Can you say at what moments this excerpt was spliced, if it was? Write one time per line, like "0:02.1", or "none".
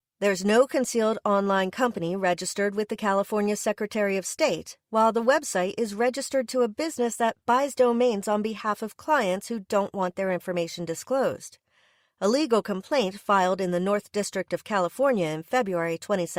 none